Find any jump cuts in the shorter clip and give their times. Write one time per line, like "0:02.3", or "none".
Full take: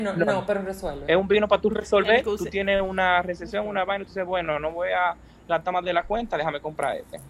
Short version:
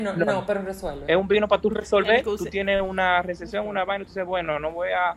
none